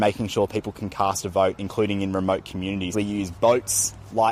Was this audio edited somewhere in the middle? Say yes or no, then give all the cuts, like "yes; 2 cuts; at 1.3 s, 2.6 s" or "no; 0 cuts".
yes; 1 cut; at 2.9 s